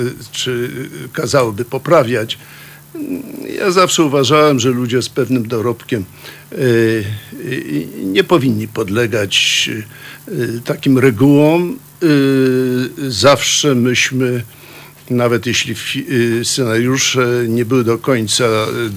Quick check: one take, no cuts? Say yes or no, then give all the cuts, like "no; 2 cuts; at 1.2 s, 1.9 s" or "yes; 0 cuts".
no; 1 cut; at 10.6 s